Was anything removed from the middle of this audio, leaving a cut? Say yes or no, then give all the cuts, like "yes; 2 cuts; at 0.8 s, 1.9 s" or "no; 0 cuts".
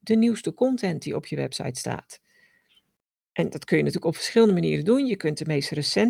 no; 0 cuts